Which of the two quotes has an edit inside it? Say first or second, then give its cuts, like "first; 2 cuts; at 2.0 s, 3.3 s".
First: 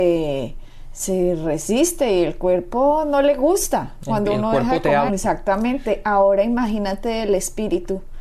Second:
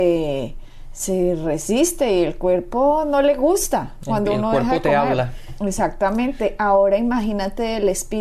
first; 1 cut; at 5.1 s